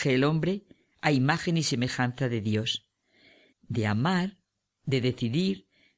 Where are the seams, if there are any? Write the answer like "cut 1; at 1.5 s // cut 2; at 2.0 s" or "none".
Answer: cut 1; at 3.5 s

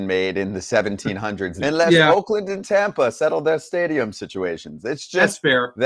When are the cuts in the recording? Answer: cut 1; at 1.6 s

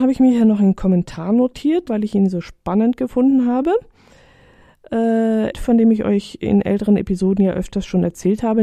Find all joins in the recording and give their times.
cut 1; at 1.9 s // cut 2; at 5.5 s

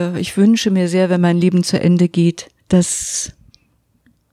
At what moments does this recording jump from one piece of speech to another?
cut 1; at 2.6 s

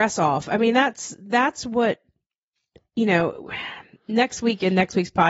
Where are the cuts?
none

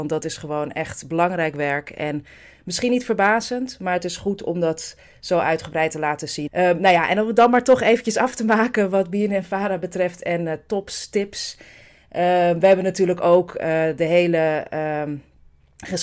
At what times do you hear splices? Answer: cut 1; at 6.5 s

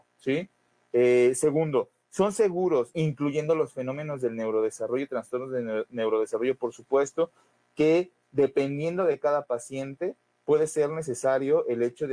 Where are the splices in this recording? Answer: cut 1; at 2.9 s

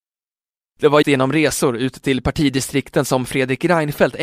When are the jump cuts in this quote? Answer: cut 1; at 1.0 s

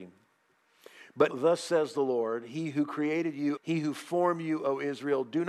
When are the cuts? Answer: cut 1; at 1.3 s // cut 2; at 3.6 s

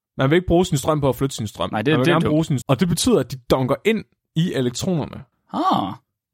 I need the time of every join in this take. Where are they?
cut 1; at 2.6 s // cut 2; at 5.3 s

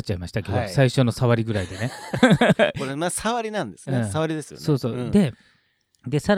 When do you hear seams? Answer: none

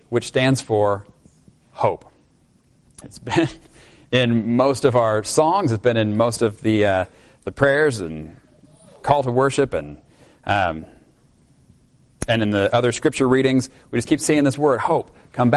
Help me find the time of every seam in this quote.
cut 1; at 3.0 s

